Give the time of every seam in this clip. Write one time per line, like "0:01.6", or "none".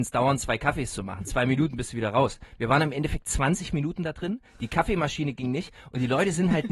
none